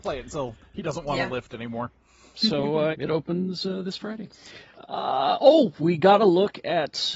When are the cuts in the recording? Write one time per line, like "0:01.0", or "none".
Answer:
0:02.9